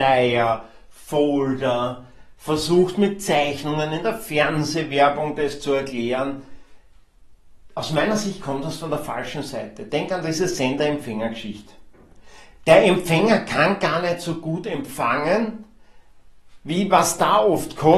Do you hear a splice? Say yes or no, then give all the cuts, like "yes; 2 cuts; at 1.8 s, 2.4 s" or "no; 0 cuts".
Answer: no; 0 cuts